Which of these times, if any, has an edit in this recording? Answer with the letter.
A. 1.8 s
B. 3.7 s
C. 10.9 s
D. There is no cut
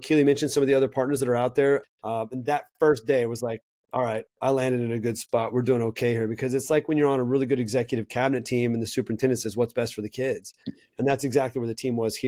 A